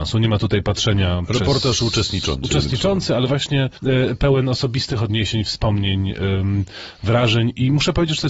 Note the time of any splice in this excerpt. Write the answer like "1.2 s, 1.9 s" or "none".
none